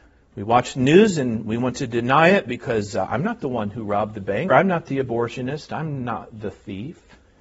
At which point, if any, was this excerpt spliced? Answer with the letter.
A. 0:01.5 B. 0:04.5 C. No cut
B